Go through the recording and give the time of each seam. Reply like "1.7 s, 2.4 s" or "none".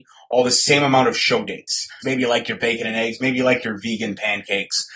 2.0 s